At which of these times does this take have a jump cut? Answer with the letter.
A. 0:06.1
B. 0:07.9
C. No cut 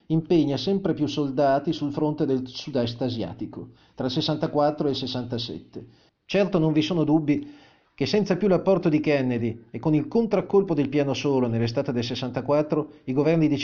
A